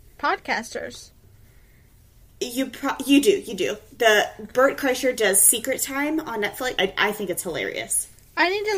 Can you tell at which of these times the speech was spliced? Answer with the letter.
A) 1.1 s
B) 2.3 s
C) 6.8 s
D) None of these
C